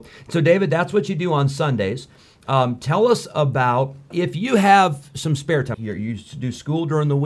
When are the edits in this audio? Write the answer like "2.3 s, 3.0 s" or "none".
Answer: 4.1 s, 5.7 s